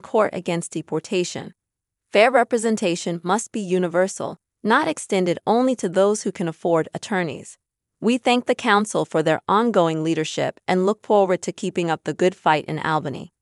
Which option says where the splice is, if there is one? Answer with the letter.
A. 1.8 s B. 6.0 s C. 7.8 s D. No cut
D